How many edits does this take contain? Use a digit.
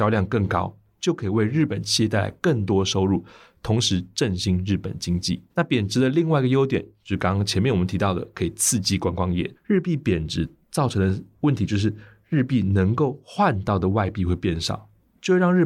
2